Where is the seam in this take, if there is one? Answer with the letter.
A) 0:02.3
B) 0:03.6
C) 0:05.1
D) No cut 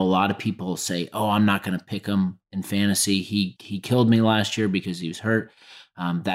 B